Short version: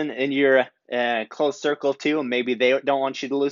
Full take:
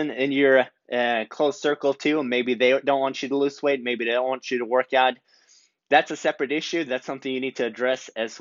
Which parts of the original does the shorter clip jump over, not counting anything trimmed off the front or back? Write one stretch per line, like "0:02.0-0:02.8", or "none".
none